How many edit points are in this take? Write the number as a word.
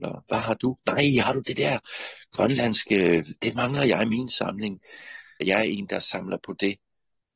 one